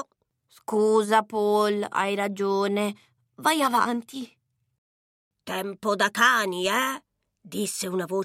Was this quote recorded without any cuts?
yes; 0 cuts

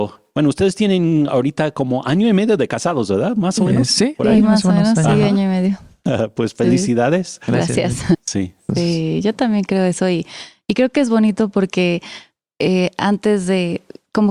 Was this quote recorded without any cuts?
no; 1 cut; at 8.1 s

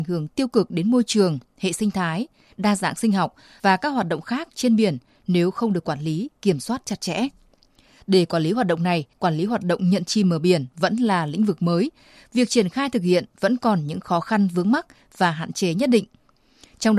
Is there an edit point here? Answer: yes; 1 cut; at 9.1 s

